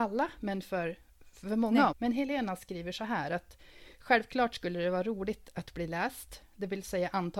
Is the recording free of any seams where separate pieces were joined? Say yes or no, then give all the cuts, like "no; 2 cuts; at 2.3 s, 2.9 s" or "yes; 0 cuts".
no; 1 cut; at 1.9 s